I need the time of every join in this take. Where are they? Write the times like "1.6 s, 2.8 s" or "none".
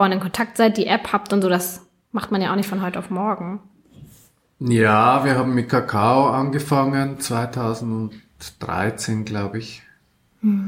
none